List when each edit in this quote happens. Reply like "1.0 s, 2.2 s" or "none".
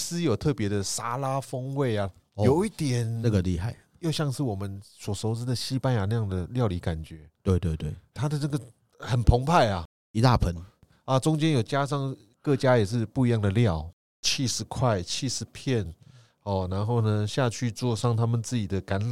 2.1 s